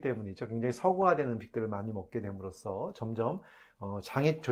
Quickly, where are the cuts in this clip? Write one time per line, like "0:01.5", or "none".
none